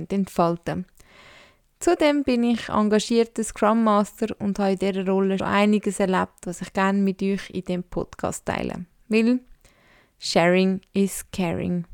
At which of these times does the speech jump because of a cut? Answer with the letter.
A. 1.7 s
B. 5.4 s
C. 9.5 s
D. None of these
B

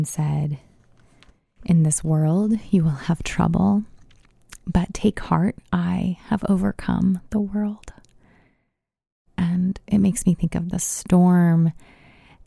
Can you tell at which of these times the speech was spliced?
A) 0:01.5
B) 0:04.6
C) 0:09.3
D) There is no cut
D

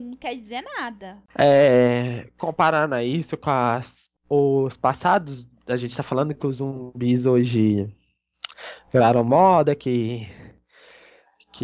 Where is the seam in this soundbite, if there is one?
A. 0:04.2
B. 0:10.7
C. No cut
C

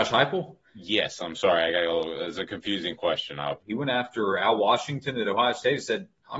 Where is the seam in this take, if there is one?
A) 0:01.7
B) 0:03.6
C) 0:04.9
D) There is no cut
B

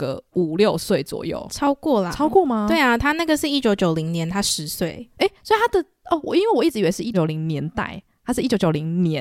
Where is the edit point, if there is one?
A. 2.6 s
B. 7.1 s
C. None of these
B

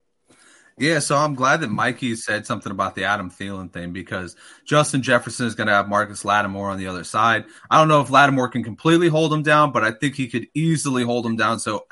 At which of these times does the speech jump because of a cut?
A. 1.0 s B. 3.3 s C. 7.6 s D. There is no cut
C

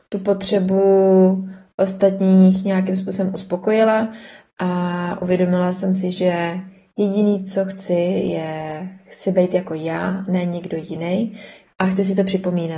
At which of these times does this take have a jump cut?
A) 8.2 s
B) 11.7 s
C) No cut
B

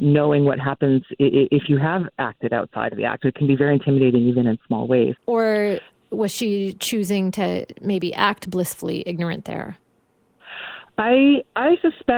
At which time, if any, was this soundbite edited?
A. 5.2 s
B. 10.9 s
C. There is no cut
A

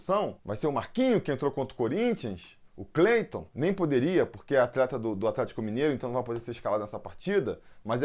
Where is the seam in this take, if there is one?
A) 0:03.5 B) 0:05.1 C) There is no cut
C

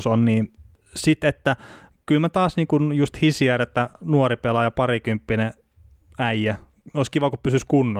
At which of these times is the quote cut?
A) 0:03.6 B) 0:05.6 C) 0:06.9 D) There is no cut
D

